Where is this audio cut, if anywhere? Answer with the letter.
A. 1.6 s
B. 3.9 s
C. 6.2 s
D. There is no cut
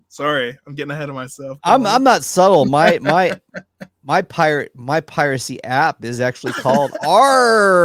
D